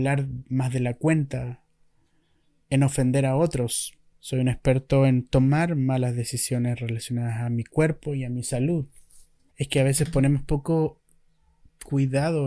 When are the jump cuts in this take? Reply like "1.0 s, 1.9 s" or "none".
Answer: 4.1 s, 9.5 s